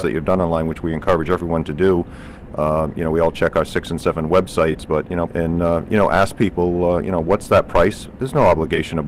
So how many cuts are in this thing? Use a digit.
1